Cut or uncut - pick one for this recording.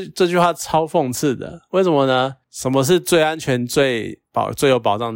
uncut